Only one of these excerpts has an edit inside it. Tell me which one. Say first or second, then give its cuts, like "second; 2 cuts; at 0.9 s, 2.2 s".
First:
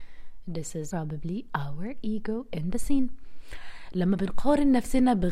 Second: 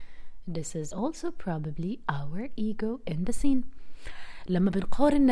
first; 1 cut; at 0.9 s